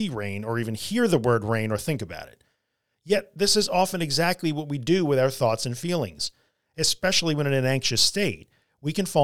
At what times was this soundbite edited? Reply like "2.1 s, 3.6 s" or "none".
none